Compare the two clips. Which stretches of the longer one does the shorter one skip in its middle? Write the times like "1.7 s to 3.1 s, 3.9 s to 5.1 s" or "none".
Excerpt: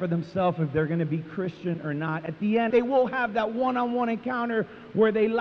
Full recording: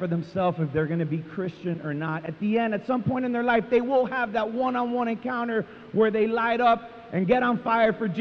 2.7 s to 3.7 s